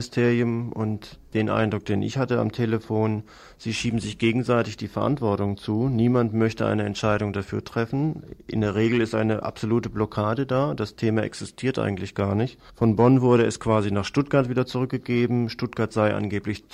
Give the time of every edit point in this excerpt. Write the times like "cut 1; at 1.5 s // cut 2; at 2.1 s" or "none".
cut 1; at 12.7 s